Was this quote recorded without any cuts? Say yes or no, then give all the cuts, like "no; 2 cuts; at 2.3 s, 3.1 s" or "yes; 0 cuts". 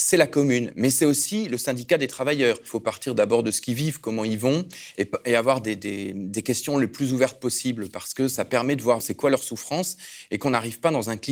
no; 1 cut; at 9.0 s